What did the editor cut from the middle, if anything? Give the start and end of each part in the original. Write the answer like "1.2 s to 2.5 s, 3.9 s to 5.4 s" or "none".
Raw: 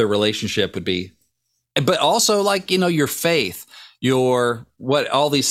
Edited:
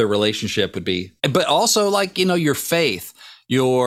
1.2 s to 1.7 s